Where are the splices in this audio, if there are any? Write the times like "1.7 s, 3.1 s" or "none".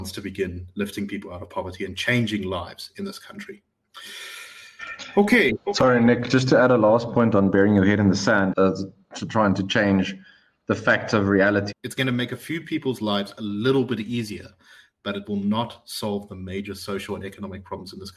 8.5 s, 11.7 s